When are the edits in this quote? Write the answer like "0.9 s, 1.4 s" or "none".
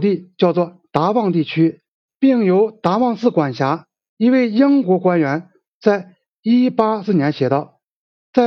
2.1 s, 4.1 s, 7.0 s